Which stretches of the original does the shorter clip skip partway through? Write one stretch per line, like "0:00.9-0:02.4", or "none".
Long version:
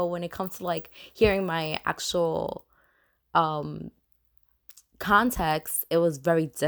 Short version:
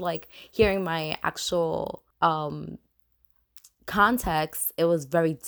0:02.7-0:03.2